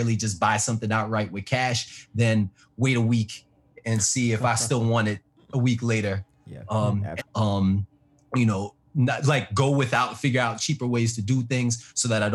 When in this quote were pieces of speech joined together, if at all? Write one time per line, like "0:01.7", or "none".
0:07.2